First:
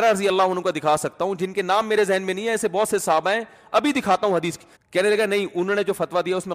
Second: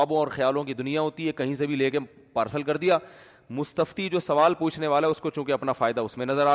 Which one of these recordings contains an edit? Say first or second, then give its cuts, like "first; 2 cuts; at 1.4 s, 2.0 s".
first; 1 cut; at 4.8 s